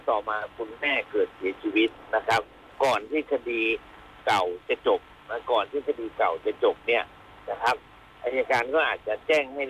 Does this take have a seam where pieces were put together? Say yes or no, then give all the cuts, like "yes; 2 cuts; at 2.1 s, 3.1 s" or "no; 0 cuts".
no; 0 cuts